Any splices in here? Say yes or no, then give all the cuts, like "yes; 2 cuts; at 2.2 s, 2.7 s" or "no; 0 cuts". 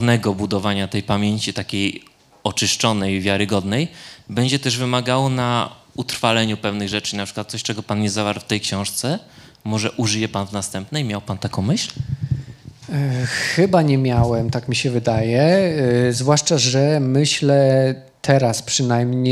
no; 0 cuts